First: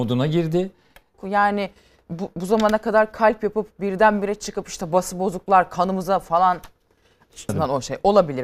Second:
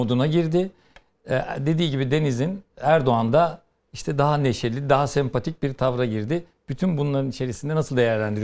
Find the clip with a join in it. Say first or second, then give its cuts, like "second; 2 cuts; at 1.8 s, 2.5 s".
first; 2 cuts; at 1.1 s, 7.5 s